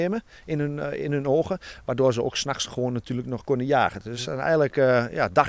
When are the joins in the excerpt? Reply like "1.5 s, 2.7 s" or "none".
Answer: none